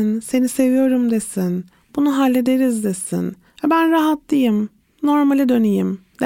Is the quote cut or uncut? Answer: uncut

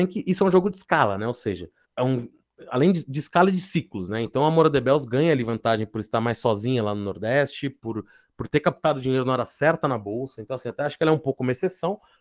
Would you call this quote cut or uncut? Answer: cut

